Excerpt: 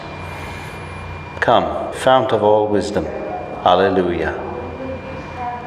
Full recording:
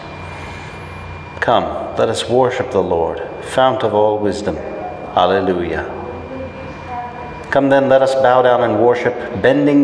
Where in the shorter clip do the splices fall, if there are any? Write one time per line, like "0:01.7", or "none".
0:01.9